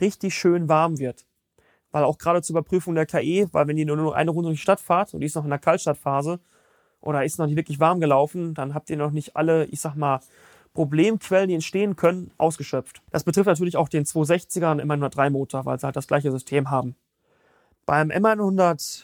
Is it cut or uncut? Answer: uncut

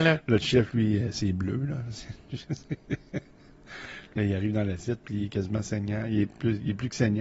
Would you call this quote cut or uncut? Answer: uncut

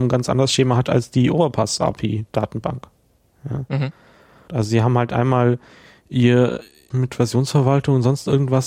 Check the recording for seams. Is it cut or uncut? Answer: cut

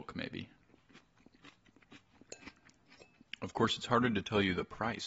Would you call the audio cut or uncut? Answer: uncut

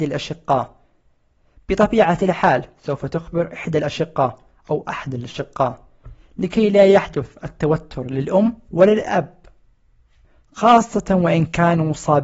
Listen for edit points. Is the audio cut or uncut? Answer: uncut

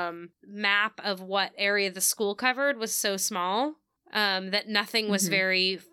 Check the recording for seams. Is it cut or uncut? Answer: uncut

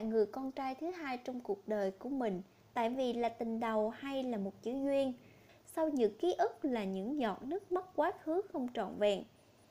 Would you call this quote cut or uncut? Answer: cut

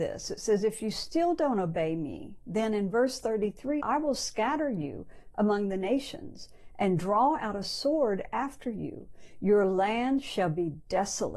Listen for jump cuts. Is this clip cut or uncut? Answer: cut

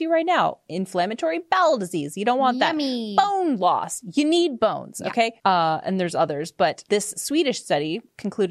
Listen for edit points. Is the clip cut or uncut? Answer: cut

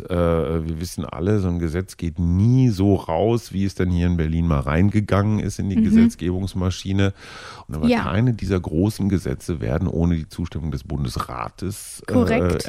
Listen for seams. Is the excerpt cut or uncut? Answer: cut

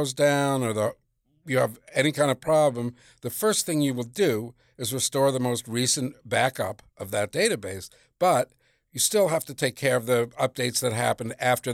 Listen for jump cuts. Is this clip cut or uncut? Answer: uncut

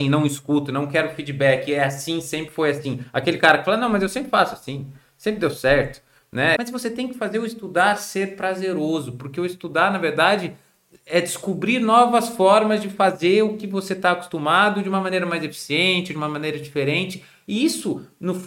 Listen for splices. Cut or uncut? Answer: cut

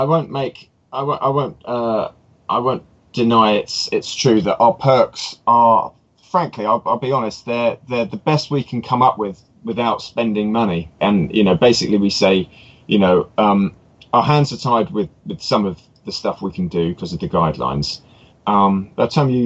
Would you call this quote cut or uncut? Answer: cut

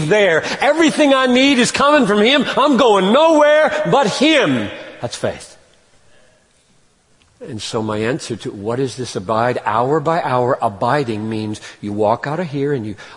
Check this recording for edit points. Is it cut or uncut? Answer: uncut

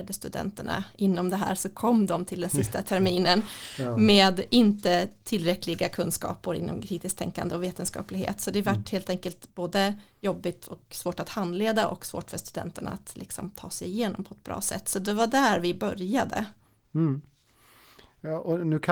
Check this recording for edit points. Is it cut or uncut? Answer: uncut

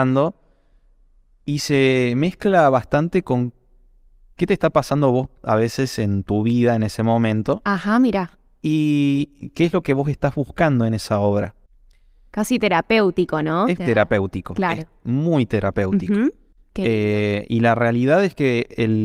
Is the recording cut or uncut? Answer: cut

